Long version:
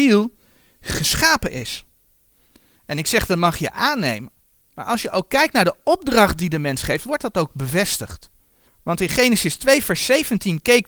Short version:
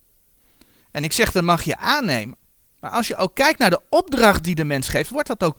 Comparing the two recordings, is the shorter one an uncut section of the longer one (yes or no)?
yes